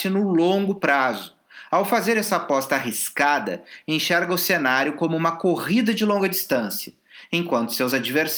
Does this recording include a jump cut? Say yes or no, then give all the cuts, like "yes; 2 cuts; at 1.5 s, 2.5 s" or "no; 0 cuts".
no; 0 cuts